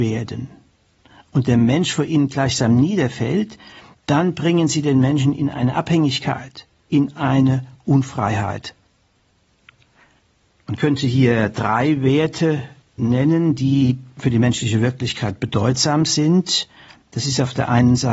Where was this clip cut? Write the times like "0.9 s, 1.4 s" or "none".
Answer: 6.9 s